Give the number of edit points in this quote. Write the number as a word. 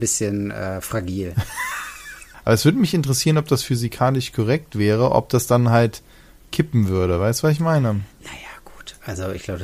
one